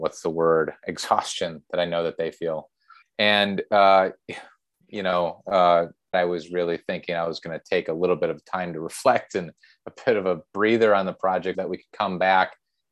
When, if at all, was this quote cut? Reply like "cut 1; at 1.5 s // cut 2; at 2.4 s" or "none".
cut 1; at 3.0 s // cut 2; at 6.1 s // cut 3; at 11.5 s